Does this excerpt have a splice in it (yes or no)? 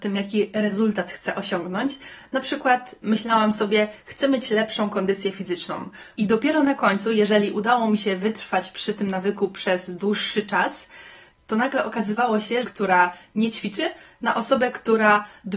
yes